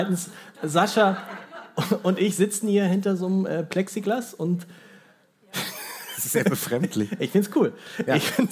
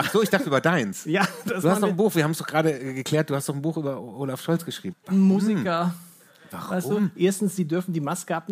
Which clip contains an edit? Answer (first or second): second